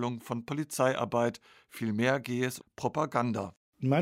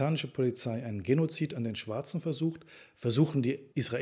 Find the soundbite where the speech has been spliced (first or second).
first